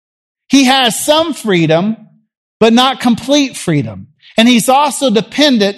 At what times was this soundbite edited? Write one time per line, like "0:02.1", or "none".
none